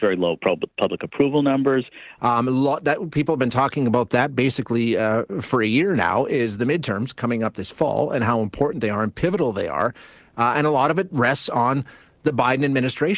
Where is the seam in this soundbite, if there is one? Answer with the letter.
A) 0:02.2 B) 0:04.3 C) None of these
A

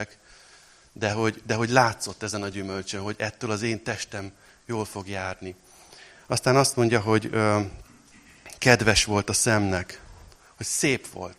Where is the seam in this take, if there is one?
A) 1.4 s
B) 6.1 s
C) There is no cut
C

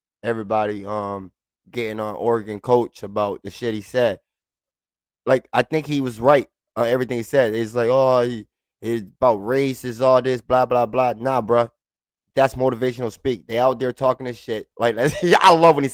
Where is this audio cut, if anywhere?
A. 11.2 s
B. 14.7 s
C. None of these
B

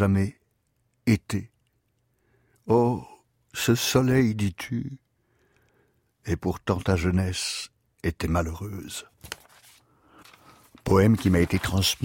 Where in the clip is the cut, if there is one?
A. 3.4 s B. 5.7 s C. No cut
C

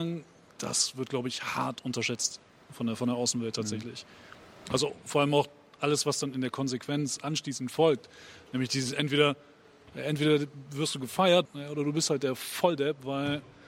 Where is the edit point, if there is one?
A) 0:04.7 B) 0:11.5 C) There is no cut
B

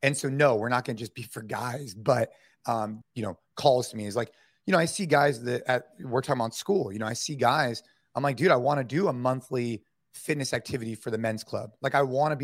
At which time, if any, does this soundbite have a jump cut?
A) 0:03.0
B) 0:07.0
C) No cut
A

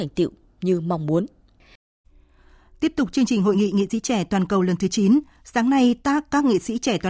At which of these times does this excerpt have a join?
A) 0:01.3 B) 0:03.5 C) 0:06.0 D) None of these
D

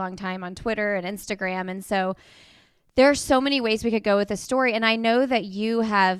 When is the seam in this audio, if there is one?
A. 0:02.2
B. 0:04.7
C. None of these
C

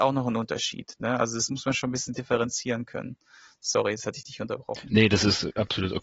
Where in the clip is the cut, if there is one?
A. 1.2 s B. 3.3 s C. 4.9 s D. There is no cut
D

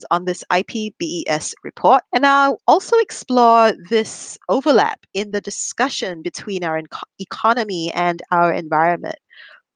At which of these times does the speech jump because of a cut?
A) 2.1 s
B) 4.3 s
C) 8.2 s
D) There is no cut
A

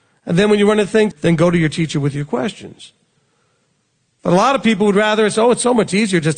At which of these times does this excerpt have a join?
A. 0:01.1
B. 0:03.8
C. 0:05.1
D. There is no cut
A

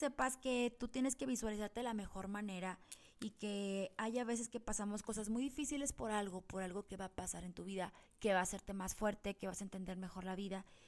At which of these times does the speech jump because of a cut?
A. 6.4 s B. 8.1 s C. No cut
B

